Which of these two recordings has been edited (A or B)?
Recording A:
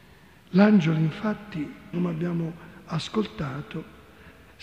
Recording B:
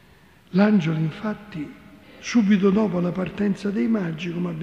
A